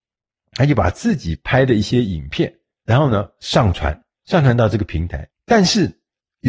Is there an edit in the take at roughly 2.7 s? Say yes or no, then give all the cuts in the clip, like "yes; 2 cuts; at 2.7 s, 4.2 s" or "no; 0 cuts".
no; 1 cut; at 5.3 s